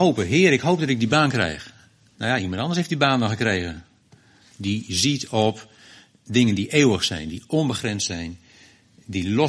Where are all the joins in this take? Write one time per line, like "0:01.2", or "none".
0:02.1
0:04.5

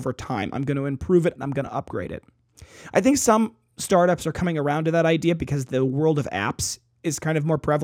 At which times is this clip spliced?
0:01.4

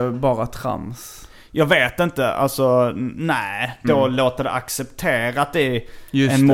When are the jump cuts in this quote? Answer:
0:03.8

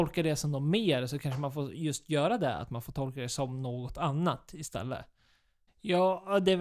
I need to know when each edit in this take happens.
0:05.7

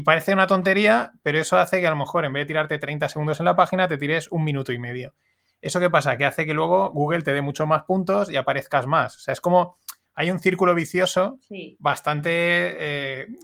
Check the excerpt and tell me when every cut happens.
none

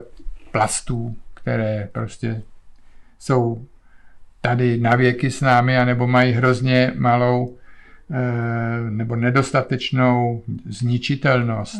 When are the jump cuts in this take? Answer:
none

